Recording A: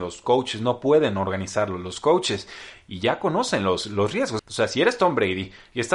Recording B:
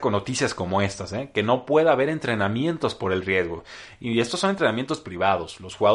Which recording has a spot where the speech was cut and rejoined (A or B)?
A